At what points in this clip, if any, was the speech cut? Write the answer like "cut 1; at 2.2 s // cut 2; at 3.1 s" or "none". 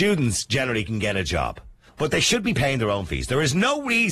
cut 1; at 1.9 s